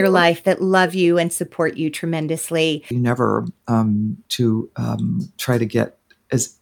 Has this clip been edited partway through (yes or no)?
yes